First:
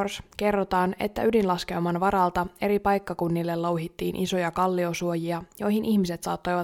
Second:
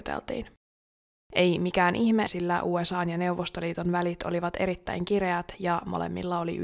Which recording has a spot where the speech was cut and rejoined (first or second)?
second